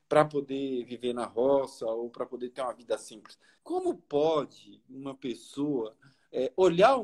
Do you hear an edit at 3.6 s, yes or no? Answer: yes